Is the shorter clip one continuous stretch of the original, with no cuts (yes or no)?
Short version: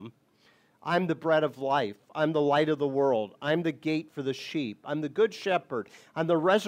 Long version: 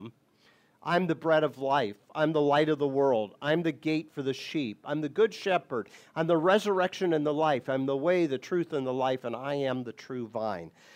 yes